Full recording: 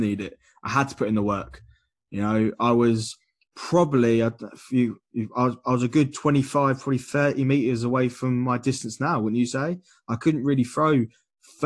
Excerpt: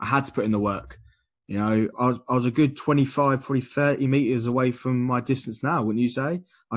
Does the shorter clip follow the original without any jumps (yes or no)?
no